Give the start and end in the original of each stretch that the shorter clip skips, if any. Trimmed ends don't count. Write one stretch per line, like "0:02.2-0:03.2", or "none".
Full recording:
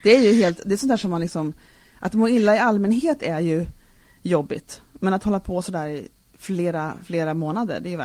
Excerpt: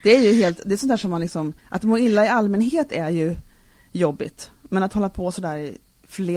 0:01.6-0:01.9

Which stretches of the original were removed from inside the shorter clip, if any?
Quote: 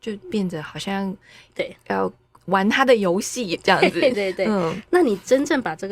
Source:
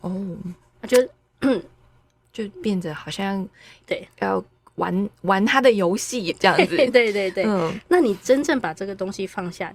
0:04.7-0:05.1
0:06.9-0:07.1

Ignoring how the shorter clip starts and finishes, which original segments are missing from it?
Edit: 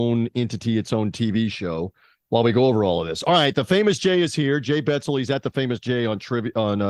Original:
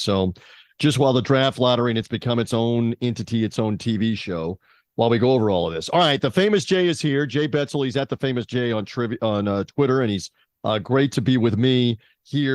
none

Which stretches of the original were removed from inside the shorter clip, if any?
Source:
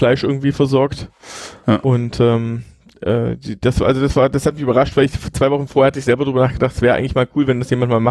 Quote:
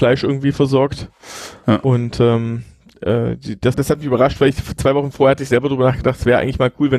0:03.7-0:04.3

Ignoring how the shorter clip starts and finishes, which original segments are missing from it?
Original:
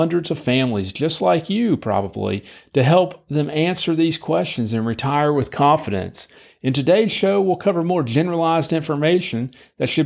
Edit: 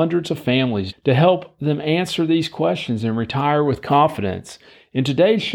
0:00.9-0:02.6

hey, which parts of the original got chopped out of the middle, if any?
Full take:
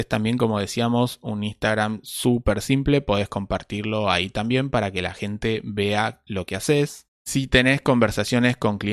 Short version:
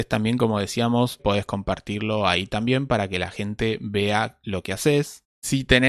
0:01.2-0:03.0

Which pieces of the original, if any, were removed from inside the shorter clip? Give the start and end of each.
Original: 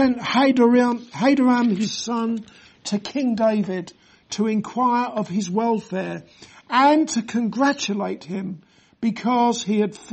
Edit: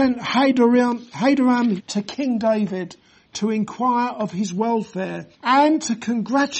0:01.8-0:02.7
0:06.3-0:06.6

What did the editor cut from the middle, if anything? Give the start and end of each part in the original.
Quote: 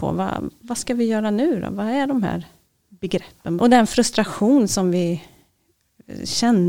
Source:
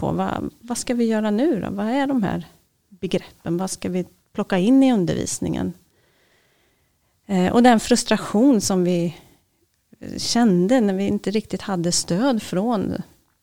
0:03.6-0:07.5

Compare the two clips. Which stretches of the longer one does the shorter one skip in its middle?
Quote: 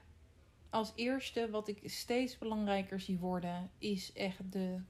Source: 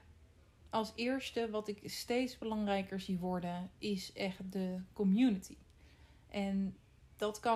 none

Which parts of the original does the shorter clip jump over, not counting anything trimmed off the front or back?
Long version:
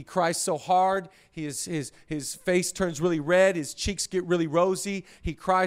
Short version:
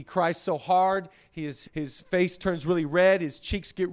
0:01.7-0:02.0

